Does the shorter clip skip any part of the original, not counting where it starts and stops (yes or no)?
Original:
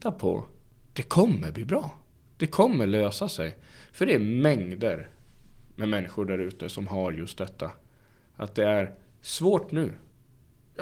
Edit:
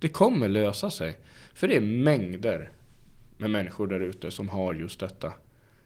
no